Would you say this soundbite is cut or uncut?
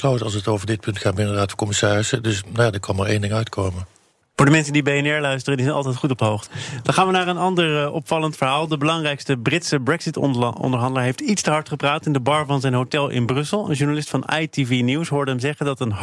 cut